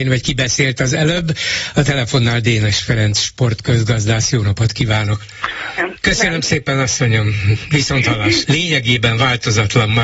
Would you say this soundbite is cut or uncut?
cut